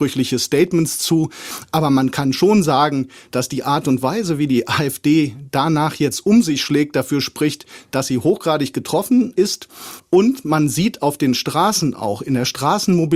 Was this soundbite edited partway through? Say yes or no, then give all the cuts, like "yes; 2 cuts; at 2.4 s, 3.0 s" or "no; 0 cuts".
no; 0 cuts